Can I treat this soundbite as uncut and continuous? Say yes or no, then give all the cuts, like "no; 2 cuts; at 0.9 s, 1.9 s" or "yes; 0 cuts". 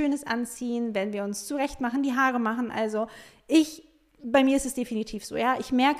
yes; 0 cuts